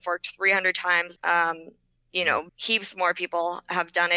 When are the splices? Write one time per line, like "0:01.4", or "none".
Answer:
0:01.2
0:02.5